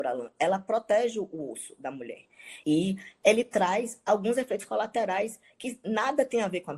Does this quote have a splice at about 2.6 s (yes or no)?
yes